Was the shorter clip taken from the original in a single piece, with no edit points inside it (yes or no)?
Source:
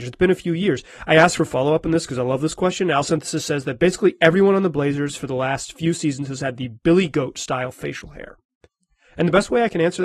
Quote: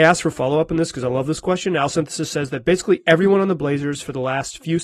yes